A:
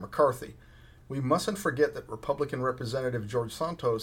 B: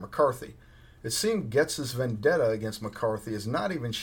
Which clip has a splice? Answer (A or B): A